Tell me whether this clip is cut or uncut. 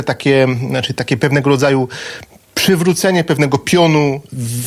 uncut